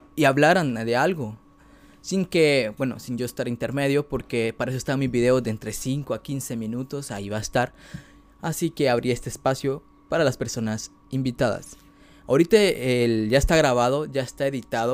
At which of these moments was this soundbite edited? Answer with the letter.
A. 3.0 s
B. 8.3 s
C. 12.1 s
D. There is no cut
D